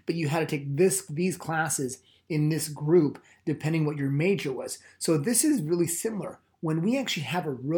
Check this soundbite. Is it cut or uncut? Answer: uncut